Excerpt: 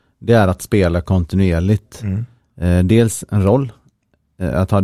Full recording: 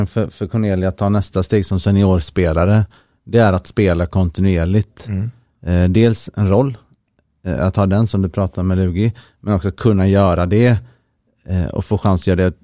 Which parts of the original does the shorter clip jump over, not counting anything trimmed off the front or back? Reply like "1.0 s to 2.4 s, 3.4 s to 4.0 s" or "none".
none